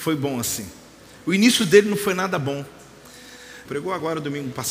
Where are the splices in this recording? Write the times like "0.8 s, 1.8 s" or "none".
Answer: 3.6 s